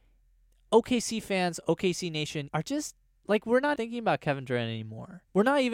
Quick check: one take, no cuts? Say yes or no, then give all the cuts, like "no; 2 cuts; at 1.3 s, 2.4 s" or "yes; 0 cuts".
no; 2 cuts; at 2.5 s, 3.8 s